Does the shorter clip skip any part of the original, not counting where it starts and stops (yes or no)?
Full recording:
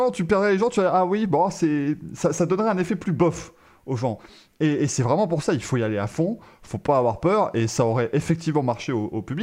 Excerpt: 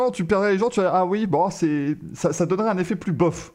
no